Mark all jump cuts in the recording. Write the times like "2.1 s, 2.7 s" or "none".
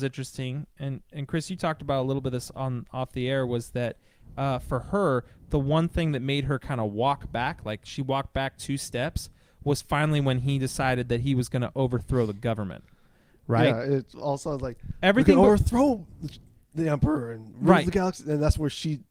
none